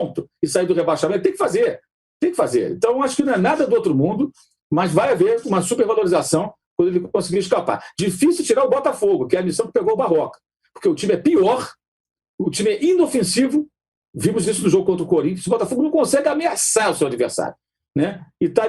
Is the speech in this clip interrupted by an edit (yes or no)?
no